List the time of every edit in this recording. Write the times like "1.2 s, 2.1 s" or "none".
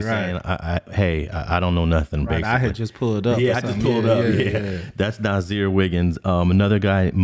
none